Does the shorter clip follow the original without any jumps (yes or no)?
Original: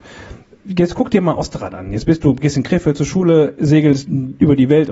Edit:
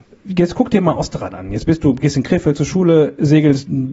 yes